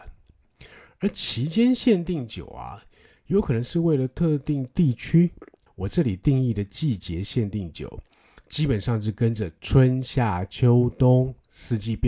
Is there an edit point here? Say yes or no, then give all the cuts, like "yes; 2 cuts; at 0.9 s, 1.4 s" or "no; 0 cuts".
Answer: yes; 1 cut; at 5.7 s